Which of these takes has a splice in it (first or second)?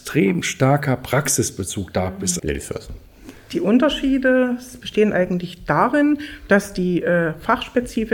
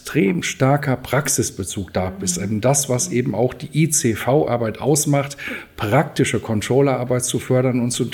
first